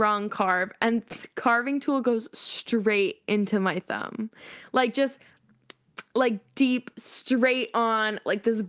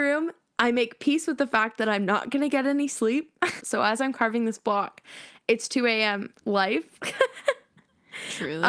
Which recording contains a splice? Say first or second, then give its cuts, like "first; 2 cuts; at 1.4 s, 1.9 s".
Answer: second; 2 cuts; at 3.6 s, 6.4 s